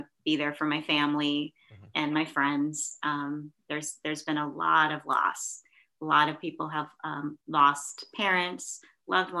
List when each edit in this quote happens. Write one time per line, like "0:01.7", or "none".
0:07.4